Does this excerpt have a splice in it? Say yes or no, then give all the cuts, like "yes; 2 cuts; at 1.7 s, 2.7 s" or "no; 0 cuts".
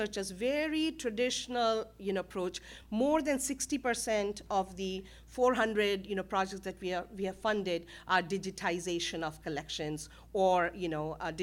no; 0 cuts